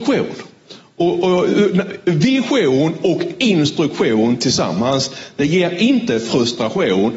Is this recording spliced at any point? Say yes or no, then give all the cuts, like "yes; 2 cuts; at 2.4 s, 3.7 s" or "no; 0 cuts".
no; 0 cuts